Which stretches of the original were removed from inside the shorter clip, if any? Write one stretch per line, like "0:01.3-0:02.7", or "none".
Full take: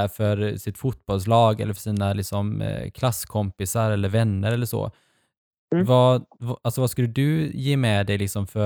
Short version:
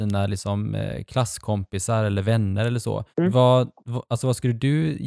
0:05.0-0:05.6